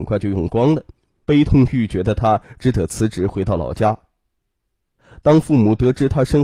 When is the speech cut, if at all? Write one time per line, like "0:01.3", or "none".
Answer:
0:01.2